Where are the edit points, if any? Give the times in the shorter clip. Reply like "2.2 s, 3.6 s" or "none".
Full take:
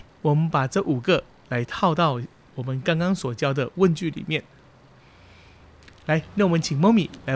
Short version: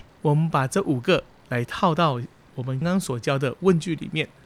2.8 s